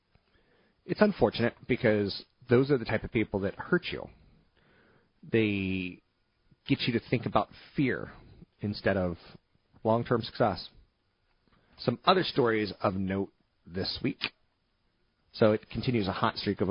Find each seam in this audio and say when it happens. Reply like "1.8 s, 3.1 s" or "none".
11.7 s, 15.2 s